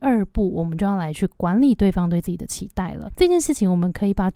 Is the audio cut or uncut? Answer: uncut